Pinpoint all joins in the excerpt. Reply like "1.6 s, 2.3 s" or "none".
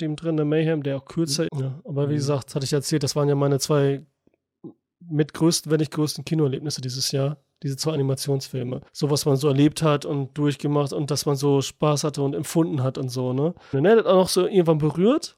1.5 s, 8.9 s, 13.7 s

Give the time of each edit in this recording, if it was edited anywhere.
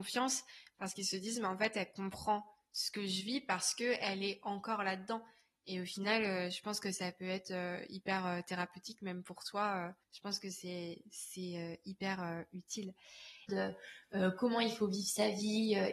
10.0 s, 13.5 s

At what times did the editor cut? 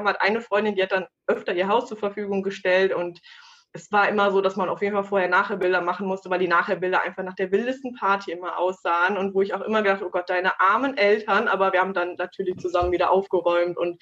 none

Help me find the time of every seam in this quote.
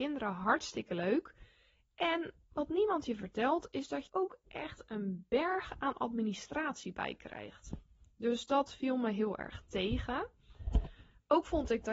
4.1 s

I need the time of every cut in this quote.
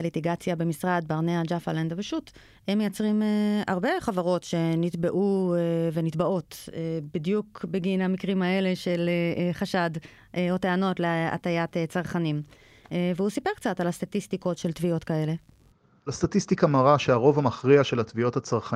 none

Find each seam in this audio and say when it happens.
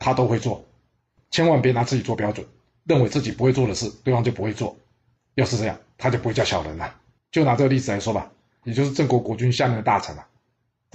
7.2 s, 8.6 s

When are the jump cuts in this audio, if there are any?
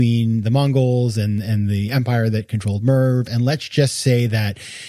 none

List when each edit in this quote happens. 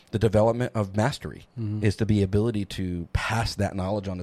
none

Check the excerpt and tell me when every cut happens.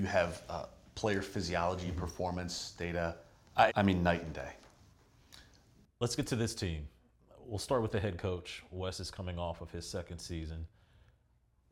3.7 s

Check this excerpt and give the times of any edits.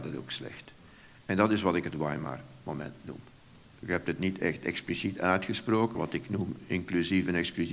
3.8 s, 6.0 s

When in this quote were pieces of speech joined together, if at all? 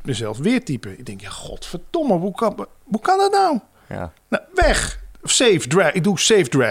2.8 s

